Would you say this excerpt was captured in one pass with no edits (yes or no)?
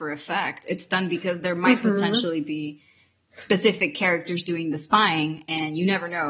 yes